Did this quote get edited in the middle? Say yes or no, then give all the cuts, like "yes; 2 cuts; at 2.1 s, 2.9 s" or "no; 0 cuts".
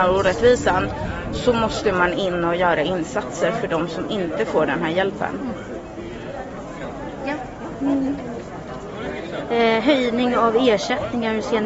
no; 0 cuts